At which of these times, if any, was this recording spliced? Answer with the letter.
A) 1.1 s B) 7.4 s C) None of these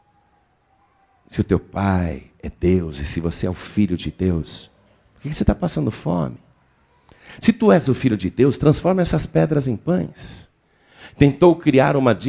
C